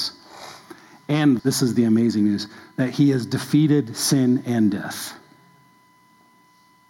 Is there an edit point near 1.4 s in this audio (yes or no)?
yes